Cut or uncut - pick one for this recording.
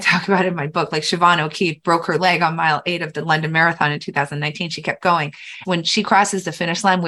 cut